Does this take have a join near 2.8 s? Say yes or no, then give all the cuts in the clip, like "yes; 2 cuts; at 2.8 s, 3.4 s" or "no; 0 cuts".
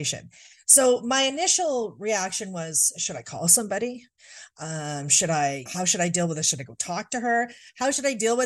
no; 1 cut; at 5.7 s